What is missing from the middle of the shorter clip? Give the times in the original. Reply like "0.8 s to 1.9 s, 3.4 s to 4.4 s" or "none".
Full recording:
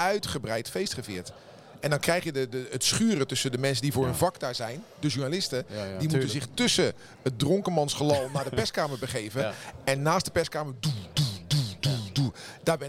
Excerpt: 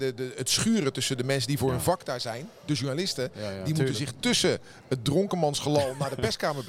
none